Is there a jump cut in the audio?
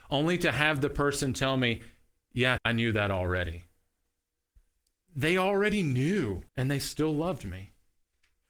yes; 2 cuts; at 2.6 s, 6.5 s

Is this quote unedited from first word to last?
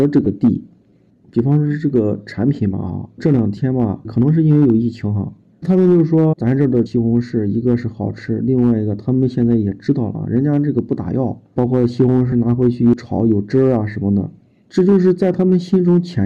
no; 2 cuts; at 1.1 s, 5.5 s

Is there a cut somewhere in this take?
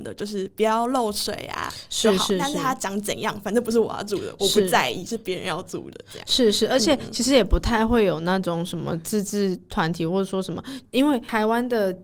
no; 0 cuts

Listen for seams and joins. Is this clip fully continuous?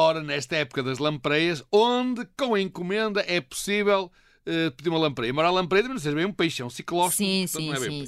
yes; 0 cuts

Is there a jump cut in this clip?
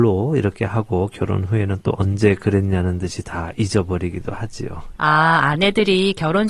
no; 0 cuts

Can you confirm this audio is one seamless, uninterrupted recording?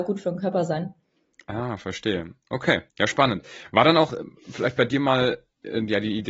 no; 1 cut; at 2.9 s

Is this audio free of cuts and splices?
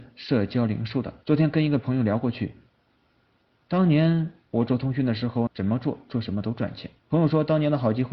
no; 3 cuts; at 1.2 s, 5.5 s, 7.0 s

